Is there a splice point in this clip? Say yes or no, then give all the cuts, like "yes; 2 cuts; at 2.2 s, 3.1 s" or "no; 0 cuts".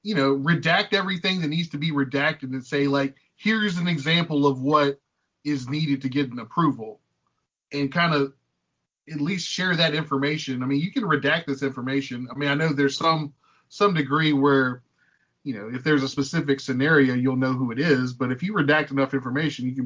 no; 0 cuts